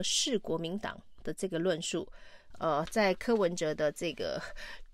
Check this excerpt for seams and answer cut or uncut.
cut